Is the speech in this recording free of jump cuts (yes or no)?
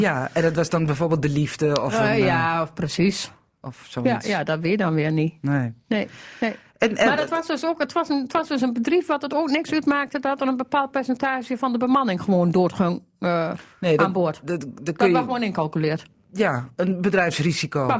yes